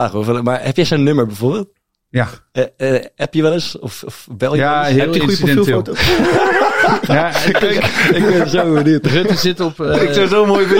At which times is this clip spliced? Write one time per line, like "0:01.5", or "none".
0:07.6